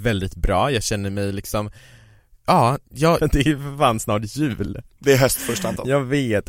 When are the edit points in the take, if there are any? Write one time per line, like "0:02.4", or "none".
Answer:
0:03.2

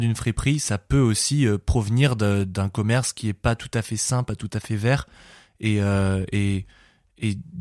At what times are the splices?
none

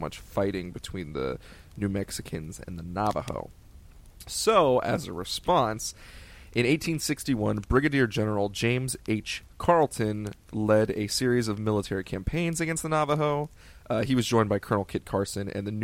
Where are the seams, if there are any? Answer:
none

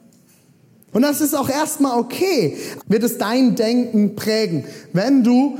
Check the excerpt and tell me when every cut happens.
0:00.9
0:02.8

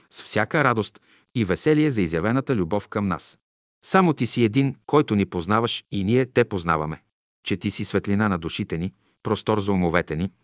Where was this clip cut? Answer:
none

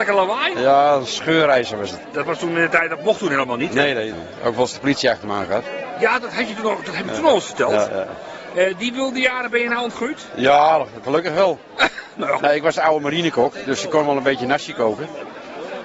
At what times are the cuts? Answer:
0:04.1
0:11.0
0:12.4

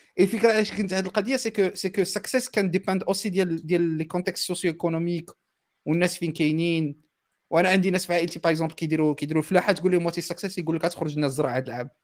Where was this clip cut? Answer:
none

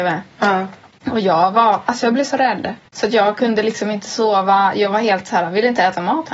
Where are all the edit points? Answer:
0:02.9

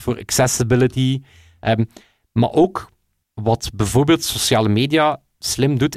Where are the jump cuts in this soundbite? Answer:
0:03.2

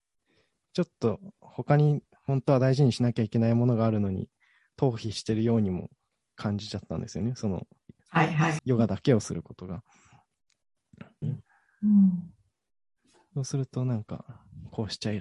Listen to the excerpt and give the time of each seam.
0:08.6
0:11.2

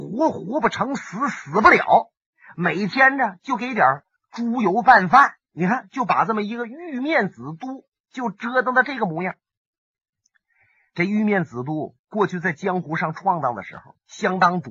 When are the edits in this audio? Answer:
none

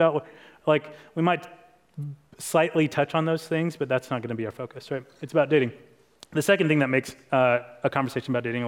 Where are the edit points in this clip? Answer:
none

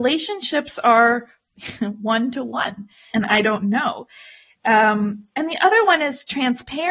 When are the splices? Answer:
0:03.1

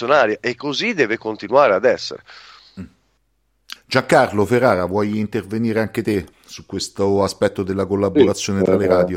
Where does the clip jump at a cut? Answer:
0:03.8
0:06.3

